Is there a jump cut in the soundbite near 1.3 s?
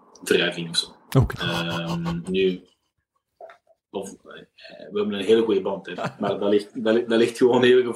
yes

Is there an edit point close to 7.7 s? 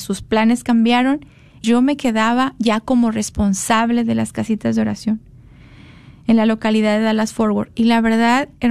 no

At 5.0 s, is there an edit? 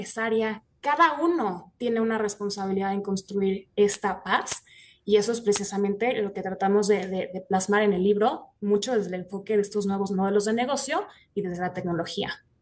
no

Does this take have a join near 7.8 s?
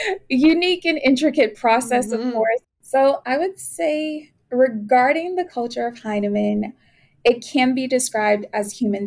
no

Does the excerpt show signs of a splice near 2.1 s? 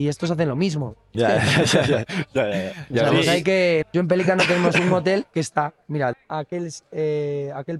no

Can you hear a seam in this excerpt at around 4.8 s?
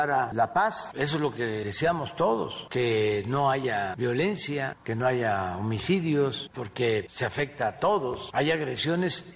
no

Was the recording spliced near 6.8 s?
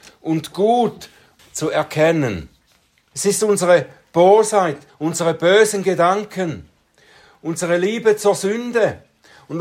no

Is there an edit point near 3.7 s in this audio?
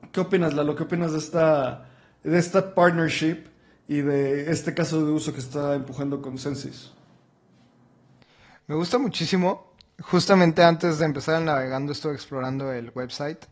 no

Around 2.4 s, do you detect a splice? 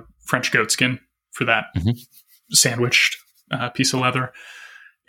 no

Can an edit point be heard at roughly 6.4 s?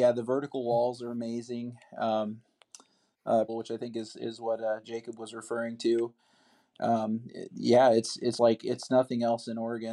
no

